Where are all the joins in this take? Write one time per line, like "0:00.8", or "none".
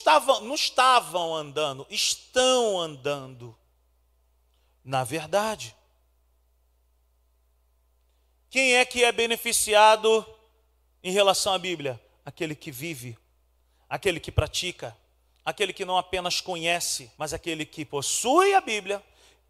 0:17.1